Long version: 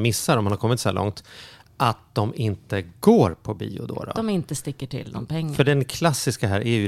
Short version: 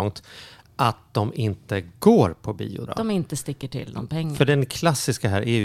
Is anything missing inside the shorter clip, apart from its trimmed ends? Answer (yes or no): yes